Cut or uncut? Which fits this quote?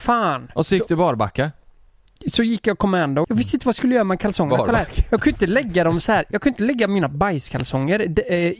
cut